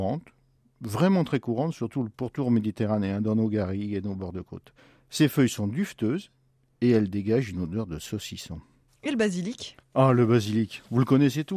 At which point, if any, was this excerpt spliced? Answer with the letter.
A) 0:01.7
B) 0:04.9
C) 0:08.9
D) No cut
C